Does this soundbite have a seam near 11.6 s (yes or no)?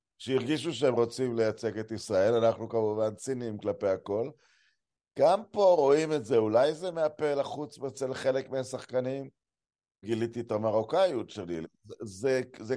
yes